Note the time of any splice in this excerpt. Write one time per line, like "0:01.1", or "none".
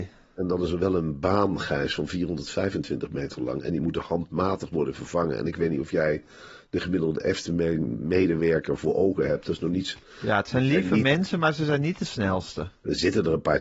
none